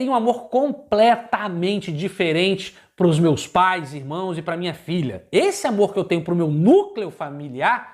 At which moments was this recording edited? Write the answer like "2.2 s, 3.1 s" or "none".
none